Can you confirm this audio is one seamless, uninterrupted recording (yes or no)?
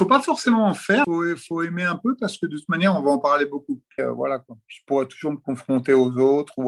no